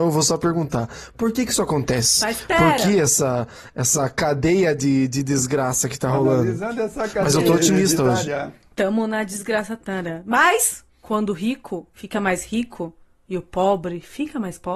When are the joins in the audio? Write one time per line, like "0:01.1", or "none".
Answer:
0:09.8
0:11.9